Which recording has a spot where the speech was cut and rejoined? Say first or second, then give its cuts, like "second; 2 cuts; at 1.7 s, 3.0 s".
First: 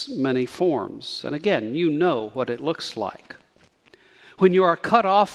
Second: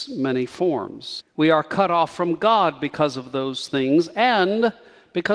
second; 1 cut; at 1.2 s